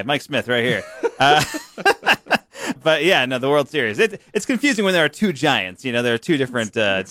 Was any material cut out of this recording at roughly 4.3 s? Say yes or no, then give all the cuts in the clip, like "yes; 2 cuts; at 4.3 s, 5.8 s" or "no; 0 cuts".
no; 1 cut; at 2.8 s